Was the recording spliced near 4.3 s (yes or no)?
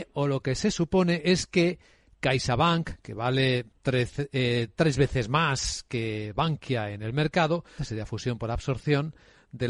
no